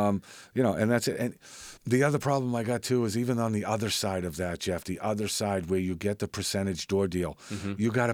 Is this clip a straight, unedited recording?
no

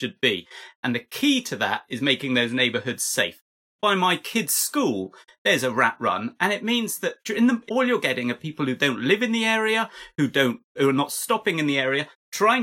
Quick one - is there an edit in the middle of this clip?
yes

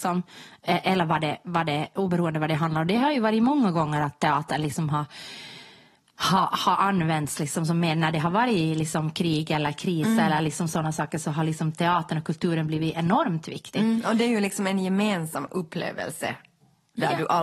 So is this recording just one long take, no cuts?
yes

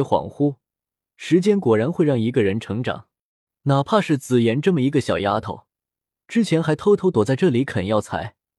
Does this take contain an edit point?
no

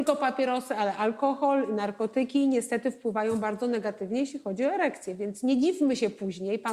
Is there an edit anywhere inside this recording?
no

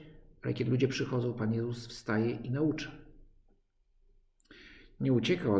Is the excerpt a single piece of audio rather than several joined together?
yes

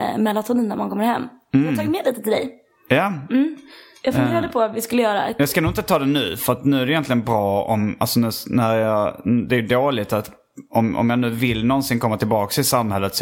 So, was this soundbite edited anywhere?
no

